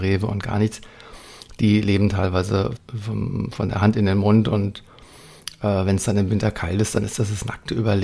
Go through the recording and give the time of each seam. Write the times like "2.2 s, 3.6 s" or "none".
2.8 s